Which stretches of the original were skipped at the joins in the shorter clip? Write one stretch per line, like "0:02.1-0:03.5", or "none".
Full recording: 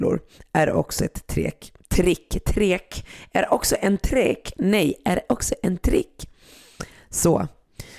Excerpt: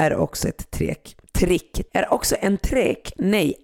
0:02.4-0:03.3